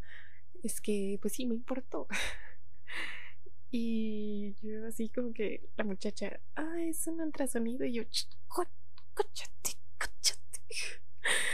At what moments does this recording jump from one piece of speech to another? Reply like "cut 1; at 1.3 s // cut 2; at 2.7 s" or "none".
none